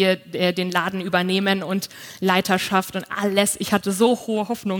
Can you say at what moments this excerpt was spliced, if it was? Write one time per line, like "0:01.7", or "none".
none